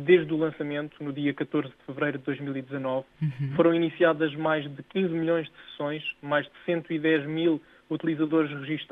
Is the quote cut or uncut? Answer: uncut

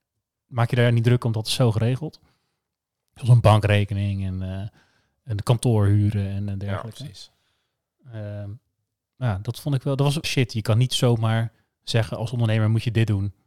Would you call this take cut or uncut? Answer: cut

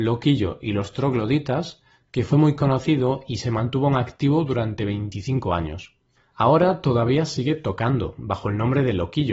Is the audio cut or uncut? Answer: uncut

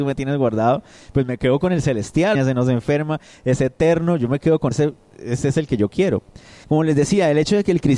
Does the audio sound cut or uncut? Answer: cut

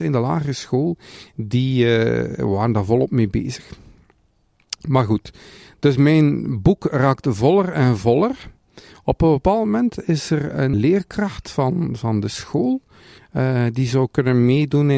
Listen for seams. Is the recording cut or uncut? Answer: cut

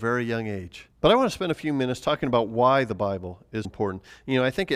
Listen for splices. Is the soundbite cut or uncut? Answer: cut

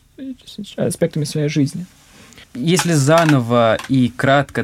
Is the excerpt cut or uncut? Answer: cut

